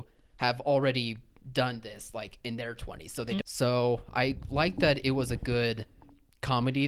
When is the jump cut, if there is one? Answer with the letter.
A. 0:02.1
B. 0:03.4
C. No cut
B